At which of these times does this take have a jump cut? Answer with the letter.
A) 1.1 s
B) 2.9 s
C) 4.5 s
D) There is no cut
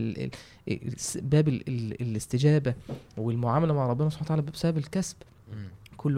D